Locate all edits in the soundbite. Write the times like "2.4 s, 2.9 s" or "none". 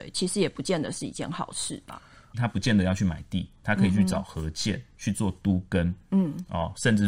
2.3 s